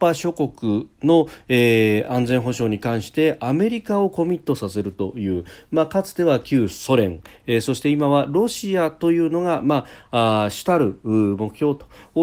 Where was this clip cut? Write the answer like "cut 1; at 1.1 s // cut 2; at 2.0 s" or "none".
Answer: none